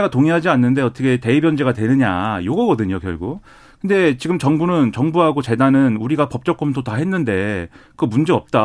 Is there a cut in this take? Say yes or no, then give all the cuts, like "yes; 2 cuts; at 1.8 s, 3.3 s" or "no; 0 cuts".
no; 0 cuts